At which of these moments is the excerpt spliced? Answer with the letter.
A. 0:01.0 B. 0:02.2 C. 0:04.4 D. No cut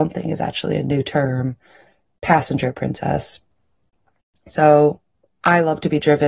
D